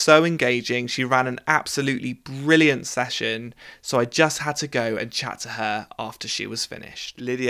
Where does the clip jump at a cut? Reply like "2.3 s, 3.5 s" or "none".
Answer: none